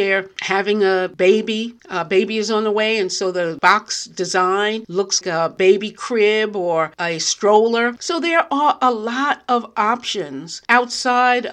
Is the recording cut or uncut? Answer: cut